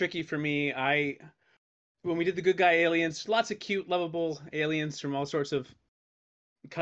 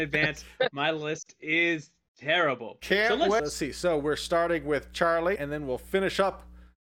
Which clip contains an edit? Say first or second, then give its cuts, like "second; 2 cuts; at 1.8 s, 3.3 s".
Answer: second; 2 cuts; at 3.4 s, 5.4 s